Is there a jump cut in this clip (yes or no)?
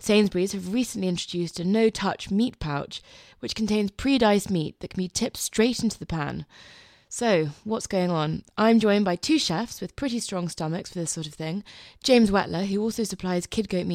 no